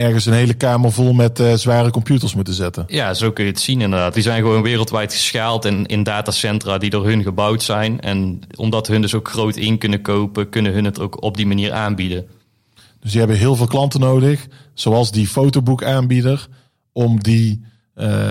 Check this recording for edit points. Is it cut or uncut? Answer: cut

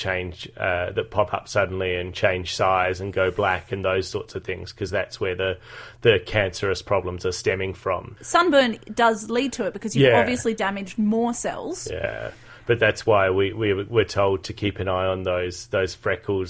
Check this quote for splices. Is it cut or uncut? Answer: cut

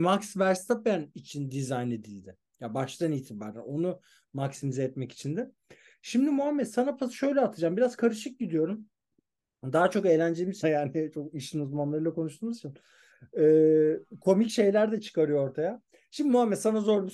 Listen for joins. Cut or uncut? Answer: cut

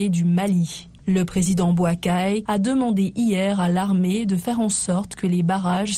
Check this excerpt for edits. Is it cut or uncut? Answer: cut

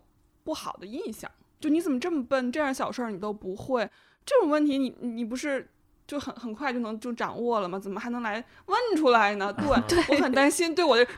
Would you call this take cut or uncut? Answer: uncut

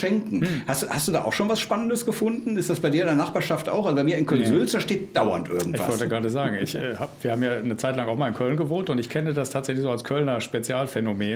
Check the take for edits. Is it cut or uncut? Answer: uncut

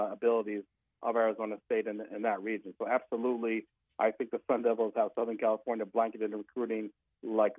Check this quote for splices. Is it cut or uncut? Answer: uncut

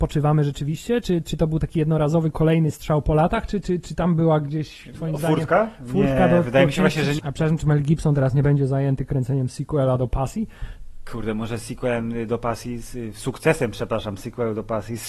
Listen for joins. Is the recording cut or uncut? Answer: cut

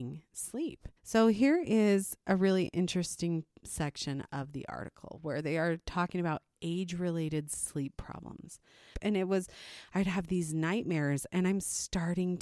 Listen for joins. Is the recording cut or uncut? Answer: cut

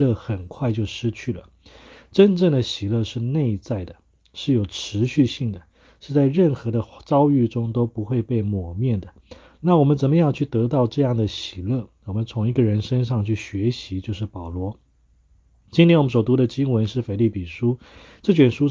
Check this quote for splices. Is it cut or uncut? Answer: uncut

